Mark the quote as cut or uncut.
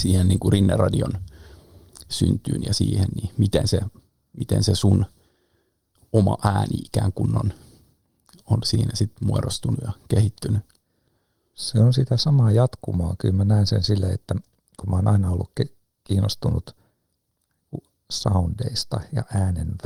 uncut